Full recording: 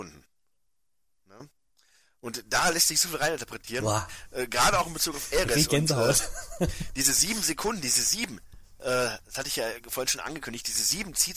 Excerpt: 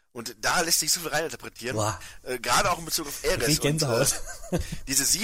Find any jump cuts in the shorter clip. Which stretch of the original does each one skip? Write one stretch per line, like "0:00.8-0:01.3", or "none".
none